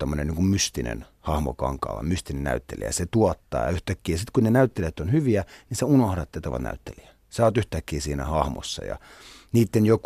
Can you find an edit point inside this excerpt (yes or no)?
no